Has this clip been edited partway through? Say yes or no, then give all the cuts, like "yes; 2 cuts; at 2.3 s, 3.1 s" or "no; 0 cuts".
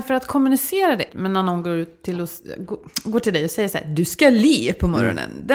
yes; 1 cut; at 1.1 s